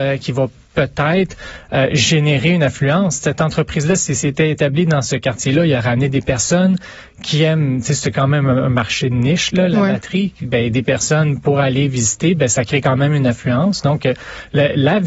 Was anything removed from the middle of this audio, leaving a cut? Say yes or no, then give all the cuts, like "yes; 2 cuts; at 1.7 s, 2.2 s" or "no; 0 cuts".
no; 0 cuts